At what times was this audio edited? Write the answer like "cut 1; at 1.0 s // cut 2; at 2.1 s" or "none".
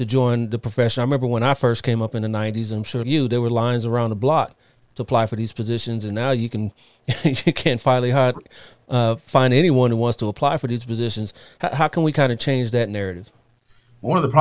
cut 1; at 3.0 s